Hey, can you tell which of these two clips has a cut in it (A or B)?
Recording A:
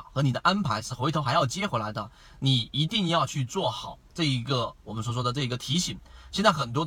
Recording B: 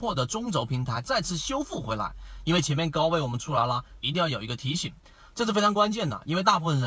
B